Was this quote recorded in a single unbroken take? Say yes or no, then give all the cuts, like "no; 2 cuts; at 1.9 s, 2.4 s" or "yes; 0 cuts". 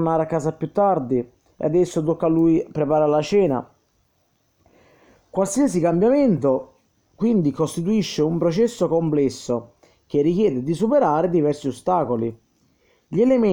yes; 0 cuts